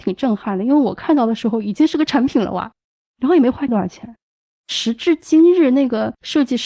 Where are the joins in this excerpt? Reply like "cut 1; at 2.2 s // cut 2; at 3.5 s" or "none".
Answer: none